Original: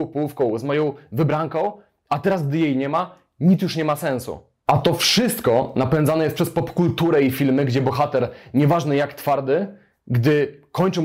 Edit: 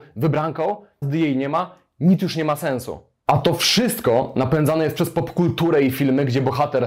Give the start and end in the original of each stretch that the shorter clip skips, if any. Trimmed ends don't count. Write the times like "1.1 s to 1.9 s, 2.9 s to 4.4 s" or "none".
2.0 s to 2.4 s